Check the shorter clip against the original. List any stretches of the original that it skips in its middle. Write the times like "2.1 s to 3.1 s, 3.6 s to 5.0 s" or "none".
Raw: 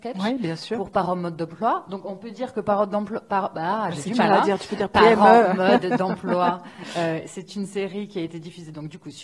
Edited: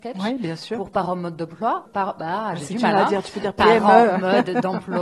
1.8 s to 3.2 s